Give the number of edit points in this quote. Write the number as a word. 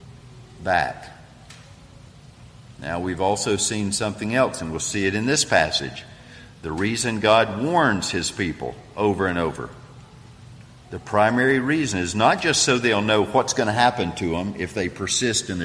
zero